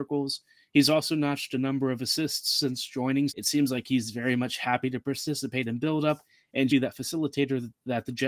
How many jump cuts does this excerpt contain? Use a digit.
2